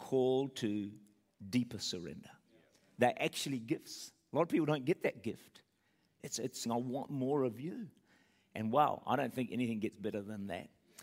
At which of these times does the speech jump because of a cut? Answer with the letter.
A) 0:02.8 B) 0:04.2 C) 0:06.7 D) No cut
C